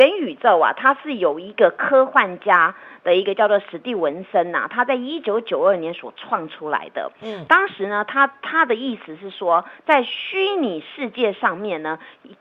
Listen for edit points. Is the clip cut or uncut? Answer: uncut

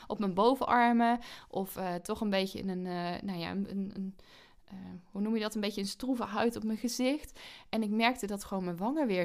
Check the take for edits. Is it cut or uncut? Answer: uncut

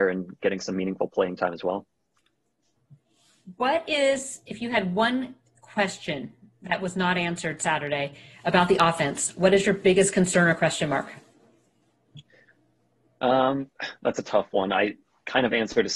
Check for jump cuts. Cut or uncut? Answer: uncut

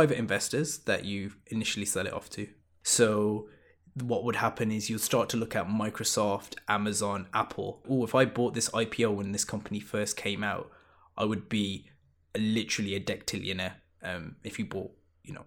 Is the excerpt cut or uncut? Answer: cut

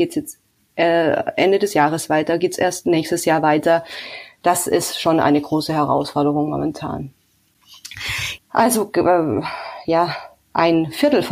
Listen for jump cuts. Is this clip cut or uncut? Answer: cut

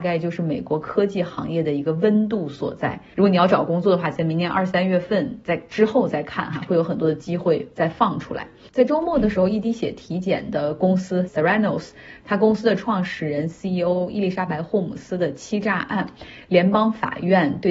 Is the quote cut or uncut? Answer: cut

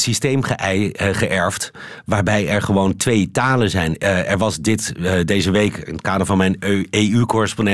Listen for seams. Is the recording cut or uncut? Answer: uncut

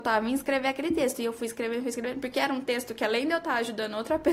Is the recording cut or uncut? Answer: uncut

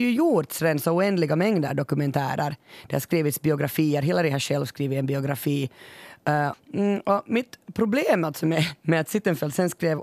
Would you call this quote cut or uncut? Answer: cut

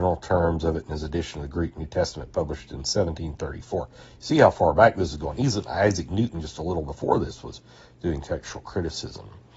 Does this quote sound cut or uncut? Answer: uncut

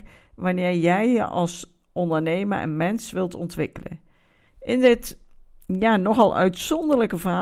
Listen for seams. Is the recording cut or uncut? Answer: cut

